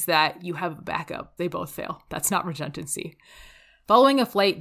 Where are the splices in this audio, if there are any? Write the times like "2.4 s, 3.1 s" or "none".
1.4 s